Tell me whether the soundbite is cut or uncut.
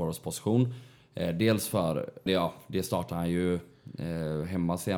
cut